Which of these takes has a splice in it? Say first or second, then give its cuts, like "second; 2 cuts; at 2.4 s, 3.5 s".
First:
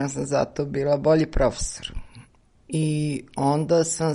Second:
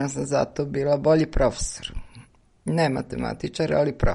first; 1 cut; at 2.5 s